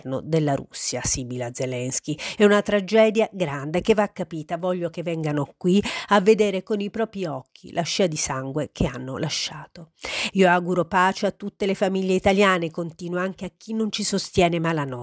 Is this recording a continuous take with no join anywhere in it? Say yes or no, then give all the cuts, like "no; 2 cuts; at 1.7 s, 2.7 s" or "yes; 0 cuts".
no; 2 cuts; at 2.4 s, 10.3 s